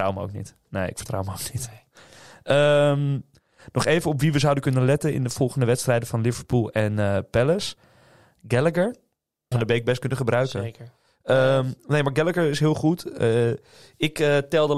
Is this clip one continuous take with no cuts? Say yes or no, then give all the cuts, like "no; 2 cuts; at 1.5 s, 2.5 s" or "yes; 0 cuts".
no; 1 cut; at 9.5 s